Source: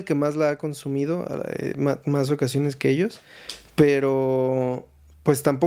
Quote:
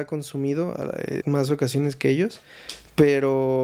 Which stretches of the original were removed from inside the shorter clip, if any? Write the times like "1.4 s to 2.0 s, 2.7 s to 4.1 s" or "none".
1.7 s to 2.0 s